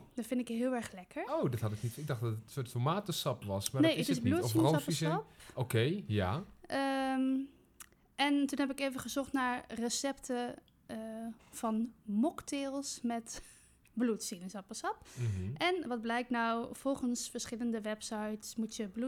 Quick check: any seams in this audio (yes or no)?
no